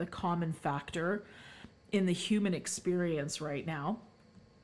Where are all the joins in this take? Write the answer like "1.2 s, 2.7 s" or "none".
none